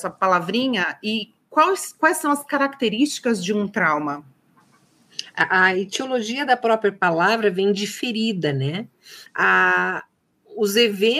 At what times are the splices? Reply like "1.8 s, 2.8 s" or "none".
9.3 s